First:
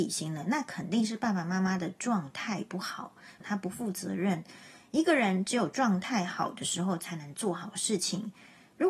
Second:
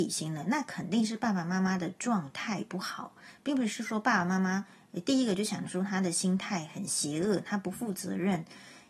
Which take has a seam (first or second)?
first